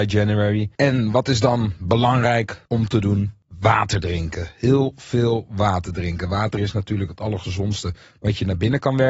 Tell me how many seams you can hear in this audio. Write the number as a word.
zero